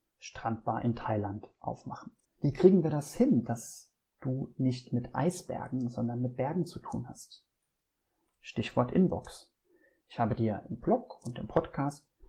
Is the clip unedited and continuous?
no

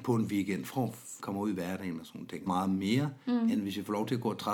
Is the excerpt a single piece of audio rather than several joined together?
no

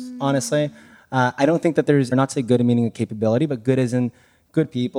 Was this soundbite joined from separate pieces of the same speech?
yes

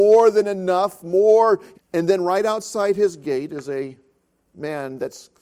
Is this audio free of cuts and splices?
no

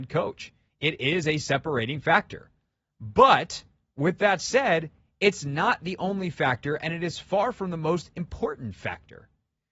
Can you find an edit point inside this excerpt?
no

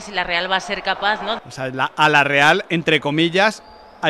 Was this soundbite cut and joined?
yes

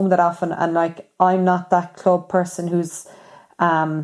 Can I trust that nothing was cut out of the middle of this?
yes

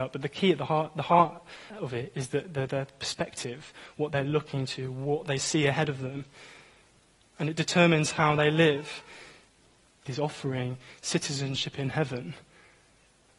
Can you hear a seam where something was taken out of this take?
yes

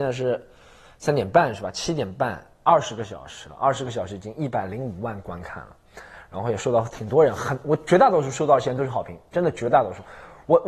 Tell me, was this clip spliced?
no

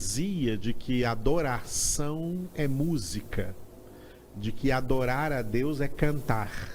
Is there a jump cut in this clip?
no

